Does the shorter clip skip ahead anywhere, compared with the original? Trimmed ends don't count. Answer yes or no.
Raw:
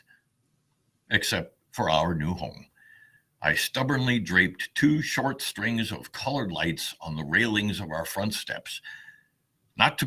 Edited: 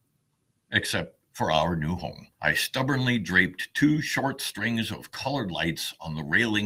yes